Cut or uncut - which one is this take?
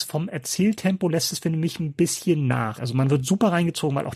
cut